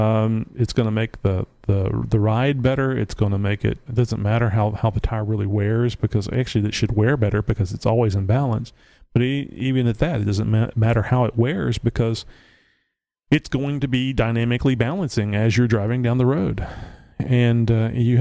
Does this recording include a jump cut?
yes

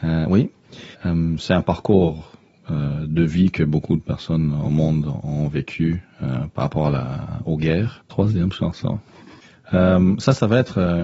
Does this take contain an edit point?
yes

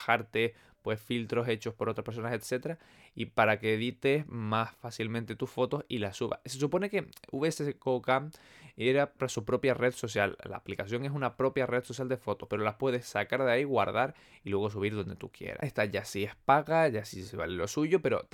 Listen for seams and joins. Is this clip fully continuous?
no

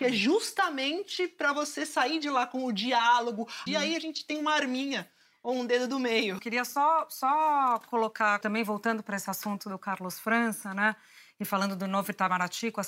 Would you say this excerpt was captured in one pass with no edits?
no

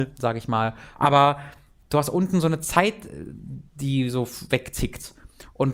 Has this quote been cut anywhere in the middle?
yes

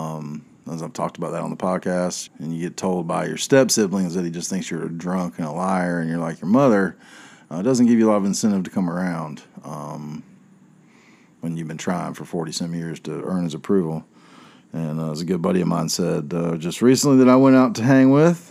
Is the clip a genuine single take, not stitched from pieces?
no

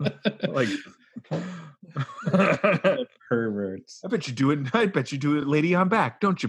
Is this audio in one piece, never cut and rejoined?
yes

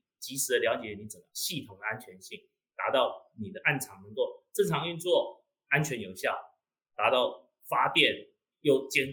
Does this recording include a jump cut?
no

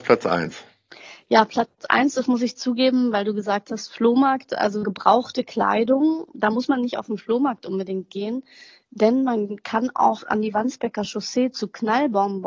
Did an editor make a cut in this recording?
no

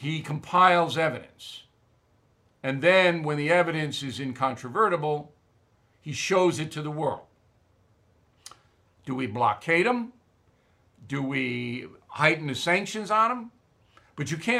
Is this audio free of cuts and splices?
no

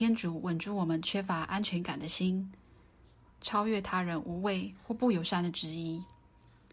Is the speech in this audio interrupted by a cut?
yes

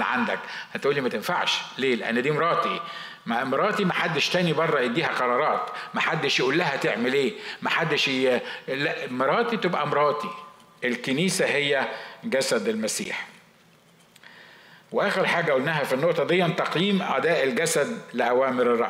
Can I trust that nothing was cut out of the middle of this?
yes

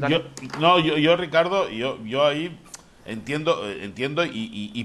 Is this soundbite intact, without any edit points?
yes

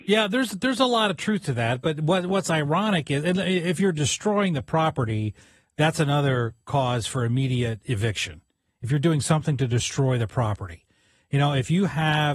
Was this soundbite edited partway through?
no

